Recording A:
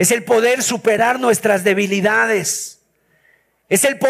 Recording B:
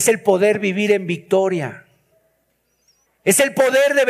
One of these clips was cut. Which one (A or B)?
B